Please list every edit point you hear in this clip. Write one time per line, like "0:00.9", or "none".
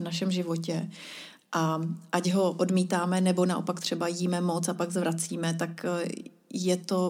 none